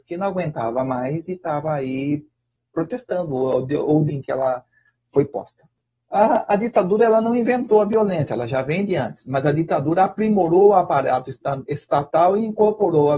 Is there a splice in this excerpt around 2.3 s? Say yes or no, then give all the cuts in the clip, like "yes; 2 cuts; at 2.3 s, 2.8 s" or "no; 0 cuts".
no; 1 cut; at 4.1 s